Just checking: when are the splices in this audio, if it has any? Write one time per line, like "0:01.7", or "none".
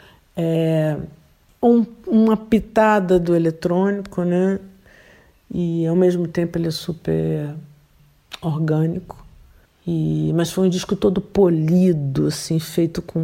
none